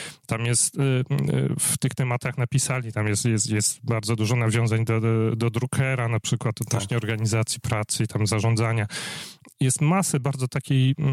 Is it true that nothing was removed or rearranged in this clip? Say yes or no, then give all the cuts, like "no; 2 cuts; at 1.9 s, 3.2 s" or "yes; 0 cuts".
no; 1 cut; at 10.2 s